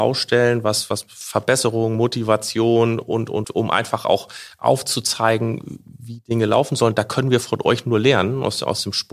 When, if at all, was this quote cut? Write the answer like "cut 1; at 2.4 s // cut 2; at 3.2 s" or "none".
cut 1; at 3.4 s

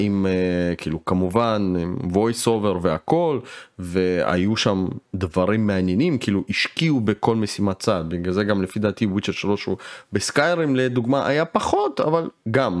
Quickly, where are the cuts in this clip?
none

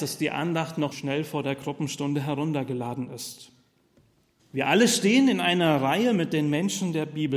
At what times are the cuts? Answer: cut 1; at 0.9 s // cut 2; at 4.4 s

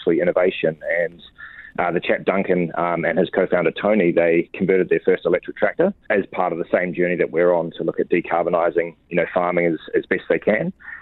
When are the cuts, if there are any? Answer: cut 1; at 6.1 s

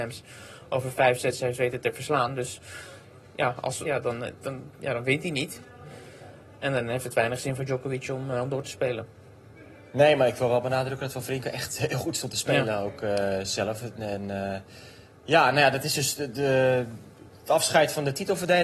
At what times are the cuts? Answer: cut 1; at 3.8 s

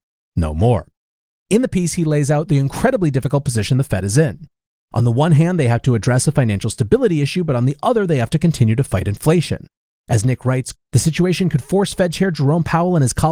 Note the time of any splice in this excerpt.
cut 1; at 10.7 s

